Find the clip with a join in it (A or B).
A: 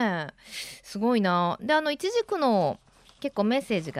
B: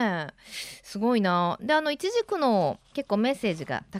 B